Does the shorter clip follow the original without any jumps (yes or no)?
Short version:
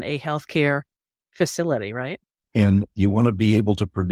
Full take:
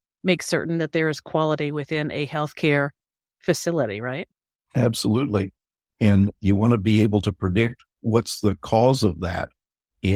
no